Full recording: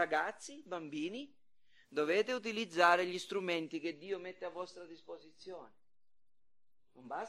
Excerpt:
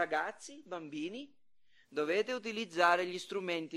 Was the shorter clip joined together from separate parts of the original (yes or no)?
no